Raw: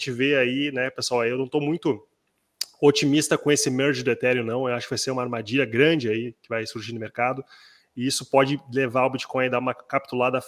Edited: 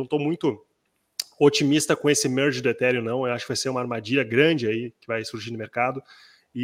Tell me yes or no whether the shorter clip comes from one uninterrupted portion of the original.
yes